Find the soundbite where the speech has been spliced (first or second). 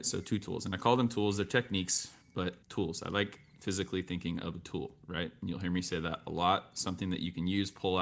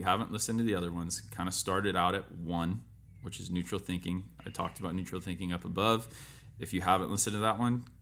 first